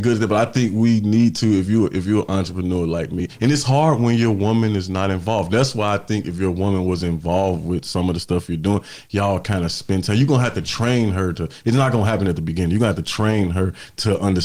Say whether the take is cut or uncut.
uncut